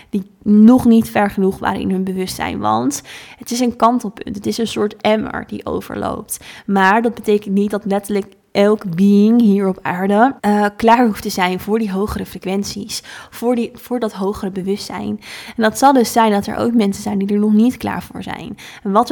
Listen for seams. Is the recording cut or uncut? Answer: cut